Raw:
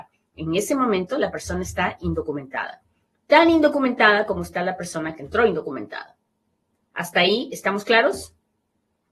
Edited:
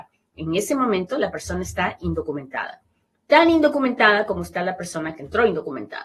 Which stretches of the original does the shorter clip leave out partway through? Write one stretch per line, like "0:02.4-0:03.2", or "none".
none